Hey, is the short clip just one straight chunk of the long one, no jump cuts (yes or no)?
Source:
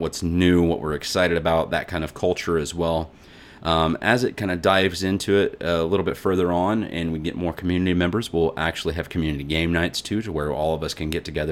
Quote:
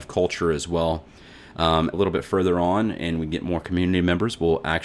no